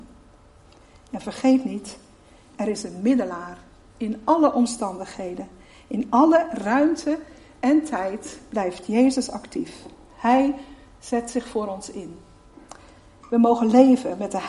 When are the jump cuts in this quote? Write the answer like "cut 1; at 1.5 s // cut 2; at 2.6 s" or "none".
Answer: none